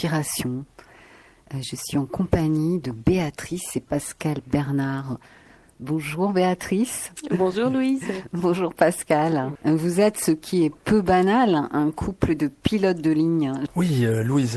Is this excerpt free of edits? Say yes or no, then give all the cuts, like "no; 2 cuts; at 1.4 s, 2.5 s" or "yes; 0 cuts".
no; 2 cuts; at 9.6 s, 13.7 s